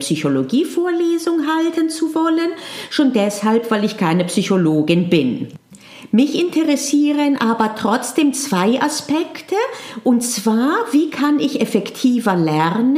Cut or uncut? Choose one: uncut